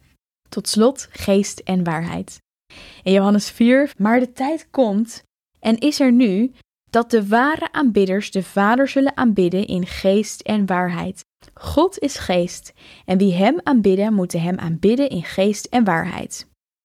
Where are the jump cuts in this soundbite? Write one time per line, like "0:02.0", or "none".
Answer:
0:03.9
0:11.4